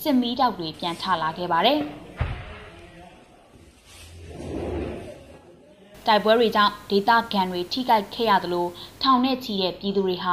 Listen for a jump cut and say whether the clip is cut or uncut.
uncut